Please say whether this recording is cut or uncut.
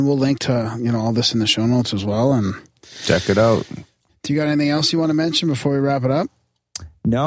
cut